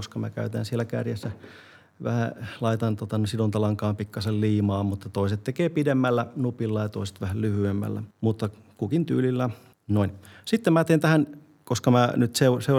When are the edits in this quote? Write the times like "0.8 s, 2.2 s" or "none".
8.1 s, 9.7 s